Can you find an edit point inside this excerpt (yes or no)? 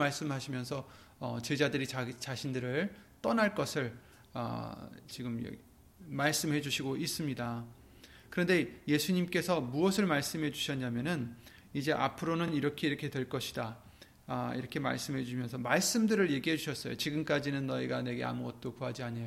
no